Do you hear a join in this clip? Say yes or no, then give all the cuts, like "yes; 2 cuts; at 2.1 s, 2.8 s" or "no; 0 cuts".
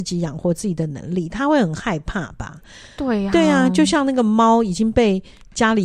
no; 0 cuts